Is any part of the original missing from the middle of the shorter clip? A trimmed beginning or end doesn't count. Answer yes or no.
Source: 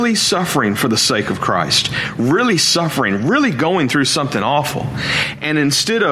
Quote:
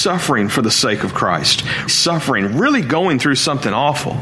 yes